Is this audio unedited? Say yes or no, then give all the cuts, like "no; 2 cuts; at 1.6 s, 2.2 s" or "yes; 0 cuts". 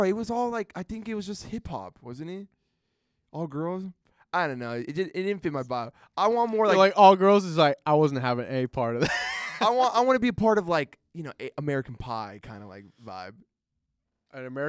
yes; 0 cuts